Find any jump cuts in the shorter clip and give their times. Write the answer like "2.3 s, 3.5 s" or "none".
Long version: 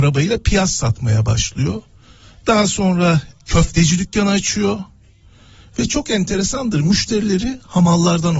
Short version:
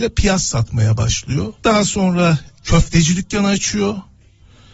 1.6 s